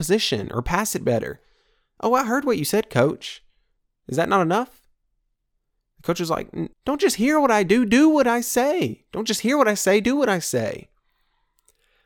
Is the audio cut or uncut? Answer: cut